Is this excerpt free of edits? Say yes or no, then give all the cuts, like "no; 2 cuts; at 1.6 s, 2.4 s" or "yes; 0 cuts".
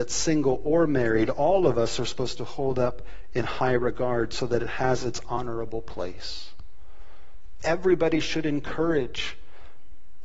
no; 1 cut; at 7.6 s